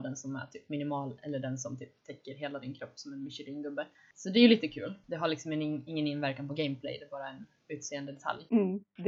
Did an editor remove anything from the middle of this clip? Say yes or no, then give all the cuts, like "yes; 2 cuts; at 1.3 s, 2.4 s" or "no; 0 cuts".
no; 0 cuts